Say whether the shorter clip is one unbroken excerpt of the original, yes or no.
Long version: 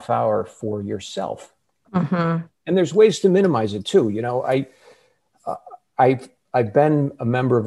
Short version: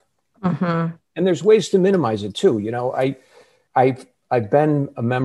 no